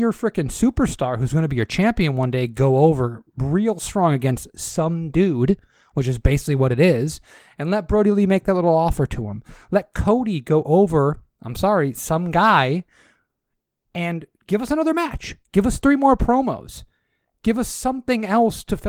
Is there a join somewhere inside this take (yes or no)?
no